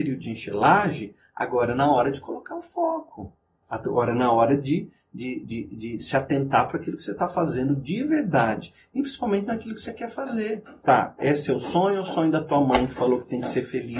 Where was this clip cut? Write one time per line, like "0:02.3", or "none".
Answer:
0:05.4
0:10.8